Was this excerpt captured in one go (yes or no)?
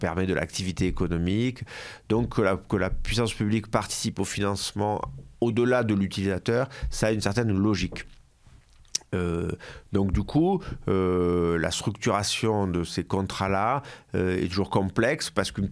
yes